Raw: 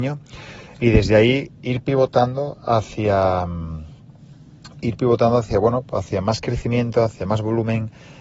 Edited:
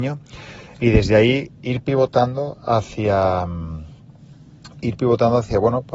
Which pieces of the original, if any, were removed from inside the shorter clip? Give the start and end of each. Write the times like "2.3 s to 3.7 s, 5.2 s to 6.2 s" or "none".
none